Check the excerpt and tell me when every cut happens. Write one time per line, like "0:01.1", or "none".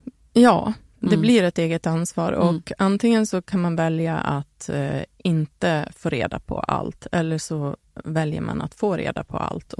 none